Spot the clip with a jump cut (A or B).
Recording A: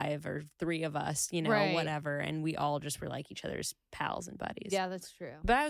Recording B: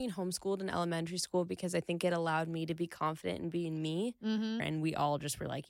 B